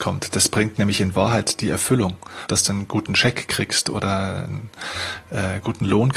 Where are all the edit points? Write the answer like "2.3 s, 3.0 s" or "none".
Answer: 2.5 s